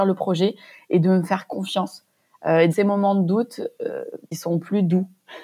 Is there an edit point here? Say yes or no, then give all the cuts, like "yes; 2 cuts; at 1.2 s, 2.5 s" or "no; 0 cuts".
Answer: yes; 2 cuts; at 2.7 s, 4.3 s